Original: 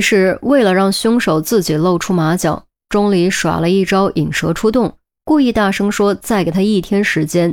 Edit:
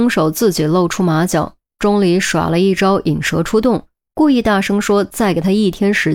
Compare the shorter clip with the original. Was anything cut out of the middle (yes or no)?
no